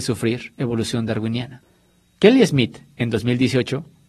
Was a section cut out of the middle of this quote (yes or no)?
no